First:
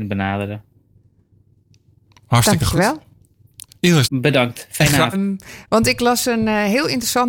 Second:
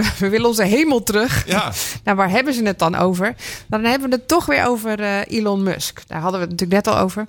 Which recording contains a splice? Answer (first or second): first